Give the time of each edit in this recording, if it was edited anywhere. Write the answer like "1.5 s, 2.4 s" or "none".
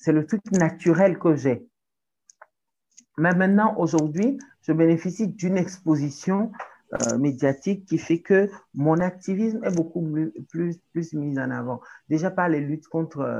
none